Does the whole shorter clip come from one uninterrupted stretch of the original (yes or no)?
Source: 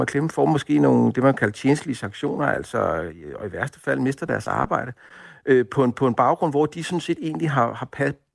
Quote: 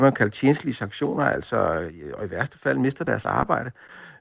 yes